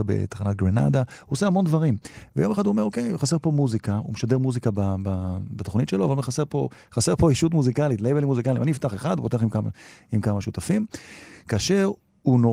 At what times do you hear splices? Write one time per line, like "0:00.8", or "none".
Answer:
none